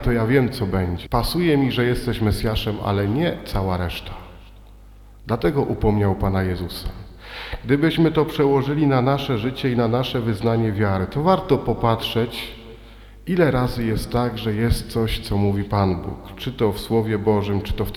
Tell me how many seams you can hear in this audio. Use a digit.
1